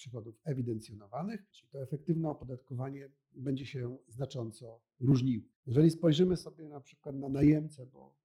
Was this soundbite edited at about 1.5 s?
yes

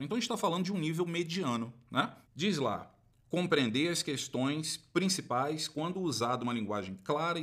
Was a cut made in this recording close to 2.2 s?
yes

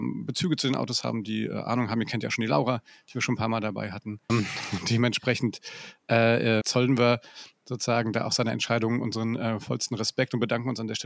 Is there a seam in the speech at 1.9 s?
no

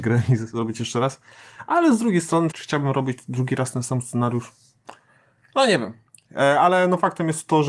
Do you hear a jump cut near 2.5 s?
yes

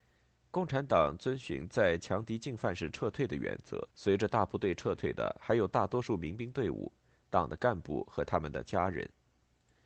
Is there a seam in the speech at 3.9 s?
yes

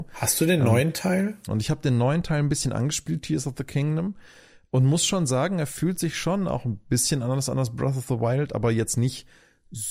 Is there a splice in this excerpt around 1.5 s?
yes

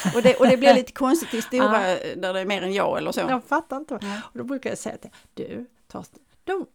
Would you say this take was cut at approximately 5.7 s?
no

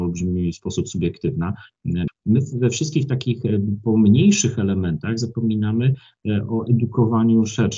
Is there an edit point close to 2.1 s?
yes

